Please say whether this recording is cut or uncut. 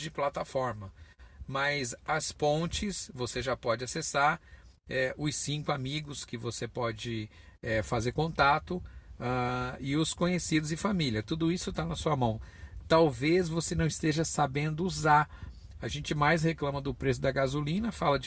cut